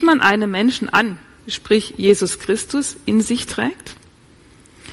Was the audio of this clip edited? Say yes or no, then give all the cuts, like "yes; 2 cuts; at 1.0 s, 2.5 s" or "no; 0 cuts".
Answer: yes; 1 cut; at 1.4 s